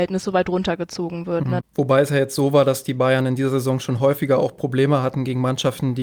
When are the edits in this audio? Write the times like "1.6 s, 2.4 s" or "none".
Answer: 1.6 s

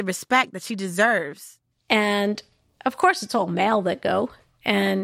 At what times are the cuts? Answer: 1.7 s

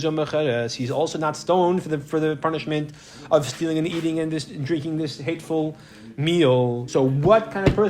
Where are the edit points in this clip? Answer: none

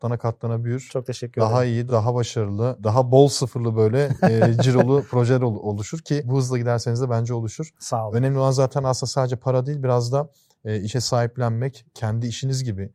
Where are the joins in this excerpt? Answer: none

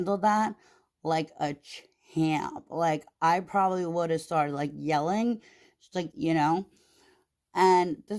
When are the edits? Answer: 6.1 s

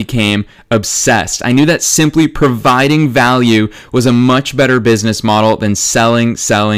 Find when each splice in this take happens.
none

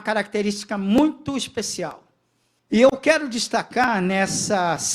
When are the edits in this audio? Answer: 2.6 s

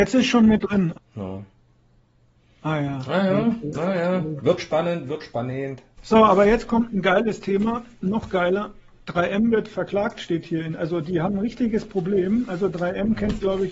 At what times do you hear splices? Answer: 0.9 s, 5.9 s

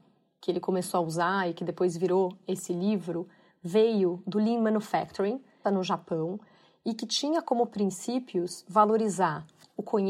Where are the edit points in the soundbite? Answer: 5.6 s

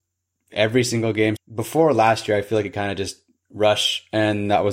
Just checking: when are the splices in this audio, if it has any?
1.4 s

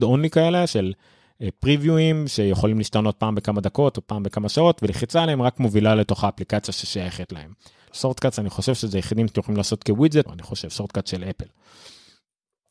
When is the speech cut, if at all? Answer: 7.9 s, 10.3 s

